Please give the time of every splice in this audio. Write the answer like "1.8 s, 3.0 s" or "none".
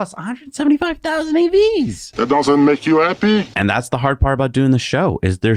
3.5 s